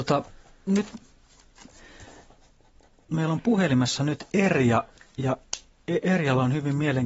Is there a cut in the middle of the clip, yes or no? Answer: no